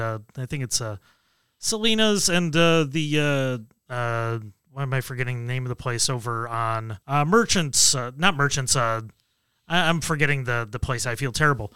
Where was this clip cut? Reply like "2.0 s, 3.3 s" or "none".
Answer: 7.0 s